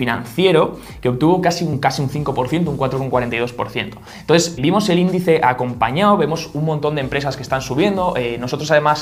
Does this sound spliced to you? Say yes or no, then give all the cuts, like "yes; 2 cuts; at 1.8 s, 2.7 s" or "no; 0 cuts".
yes; 1 cut; at 4.6 s